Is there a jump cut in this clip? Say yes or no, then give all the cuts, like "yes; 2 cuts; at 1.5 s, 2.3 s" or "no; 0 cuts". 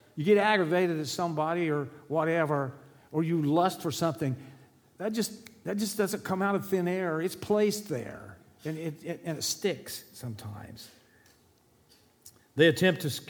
no; 0 cuts